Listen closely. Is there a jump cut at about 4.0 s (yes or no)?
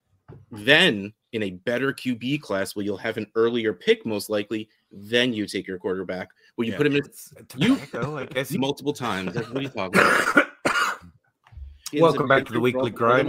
no